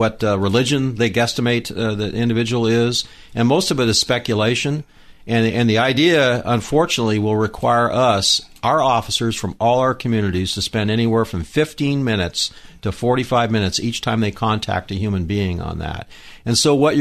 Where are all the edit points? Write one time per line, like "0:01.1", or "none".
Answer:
none